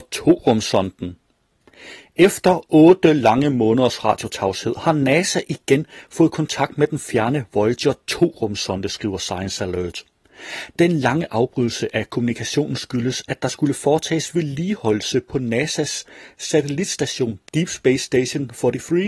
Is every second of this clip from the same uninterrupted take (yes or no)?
yes